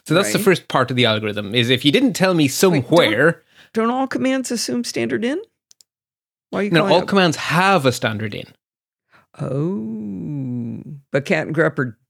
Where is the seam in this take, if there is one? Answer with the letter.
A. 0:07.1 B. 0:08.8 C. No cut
C